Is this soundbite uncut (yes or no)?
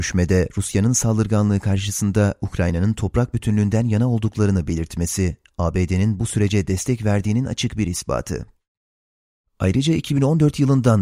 yes